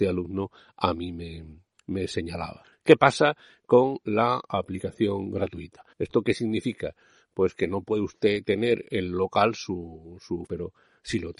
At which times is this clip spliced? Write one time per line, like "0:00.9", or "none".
0:02.7
0:05.9
0:10.5